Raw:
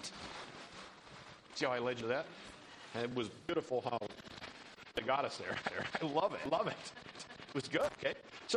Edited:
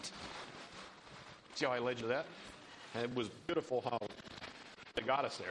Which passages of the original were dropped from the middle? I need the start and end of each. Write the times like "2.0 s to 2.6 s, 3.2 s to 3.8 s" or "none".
none